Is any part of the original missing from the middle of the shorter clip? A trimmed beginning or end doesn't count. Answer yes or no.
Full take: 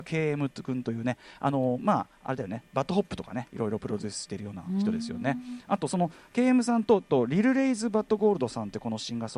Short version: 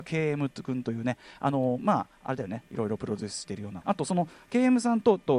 yes